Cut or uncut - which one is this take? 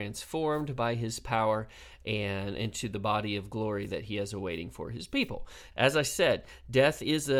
cut